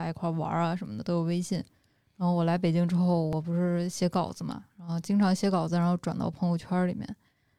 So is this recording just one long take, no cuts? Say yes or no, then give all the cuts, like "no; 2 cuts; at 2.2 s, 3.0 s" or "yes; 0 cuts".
yes; 0 cuts